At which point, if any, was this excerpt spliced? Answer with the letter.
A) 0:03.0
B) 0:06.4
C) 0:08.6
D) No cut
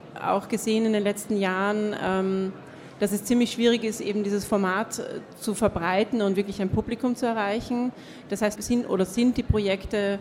C